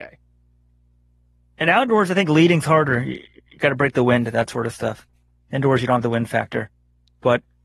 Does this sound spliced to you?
no; 0 cuts

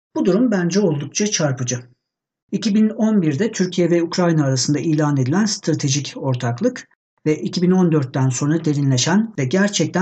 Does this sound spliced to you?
no; 0 cuts

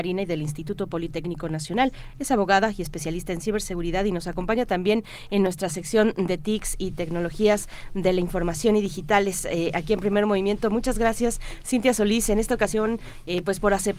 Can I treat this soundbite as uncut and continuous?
yes; 0 cuts

